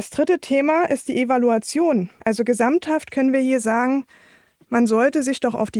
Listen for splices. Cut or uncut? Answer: cut